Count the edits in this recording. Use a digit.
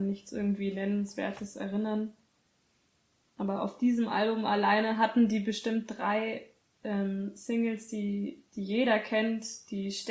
0